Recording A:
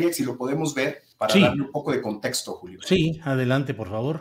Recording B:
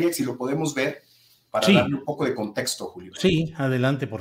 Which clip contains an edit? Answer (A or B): A